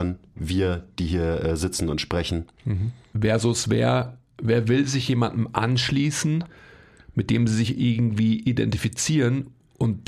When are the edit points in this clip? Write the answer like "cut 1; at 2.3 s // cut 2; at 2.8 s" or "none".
cut 1; at 3.1 s